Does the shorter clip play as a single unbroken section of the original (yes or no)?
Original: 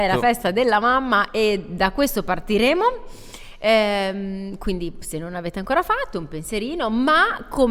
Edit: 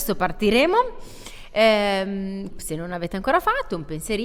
no